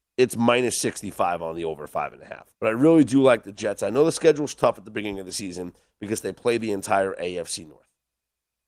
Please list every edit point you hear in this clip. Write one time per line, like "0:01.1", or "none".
0:02.5